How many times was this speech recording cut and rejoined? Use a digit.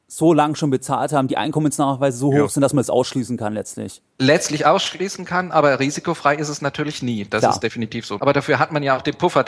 1